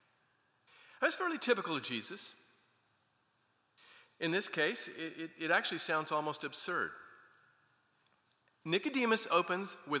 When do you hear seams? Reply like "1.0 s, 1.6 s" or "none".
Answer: none

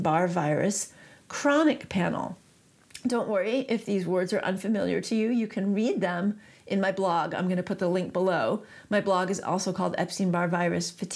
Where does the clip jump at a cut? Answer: none

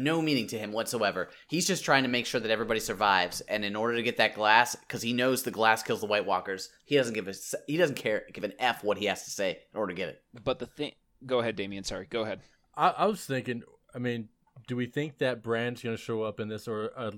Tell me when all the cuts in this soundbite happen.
none

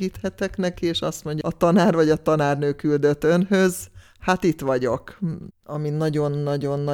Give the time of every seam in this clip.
1.4 s, 5.5 s

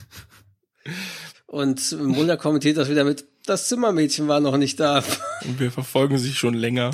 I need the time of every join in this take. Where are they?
1.3 s, 5.4 s

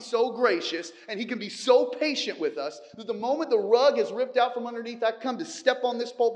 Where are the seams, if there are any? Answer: none

